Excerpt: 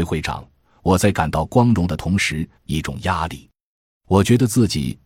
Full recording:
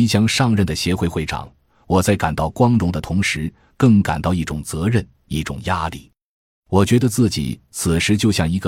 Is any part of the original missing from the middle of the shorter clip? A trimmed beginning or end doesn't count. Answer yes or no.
yes